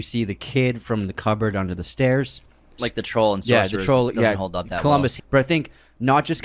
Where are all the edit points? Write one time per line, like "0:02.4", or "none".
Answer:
0:02.8
0:05.2